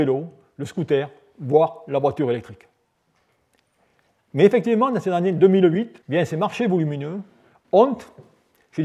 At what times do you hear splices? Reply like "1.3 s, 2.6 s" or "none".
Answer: 6.0 s